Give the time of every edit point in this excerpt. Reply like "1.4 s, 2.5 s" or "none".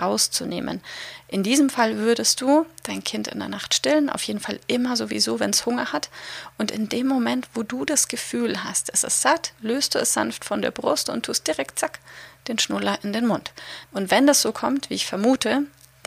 13.9 s